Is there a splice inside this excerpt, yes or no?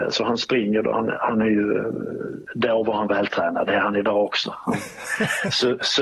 no